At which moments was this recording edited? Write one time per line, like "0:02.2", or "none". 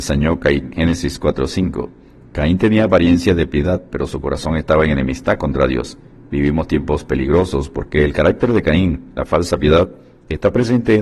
none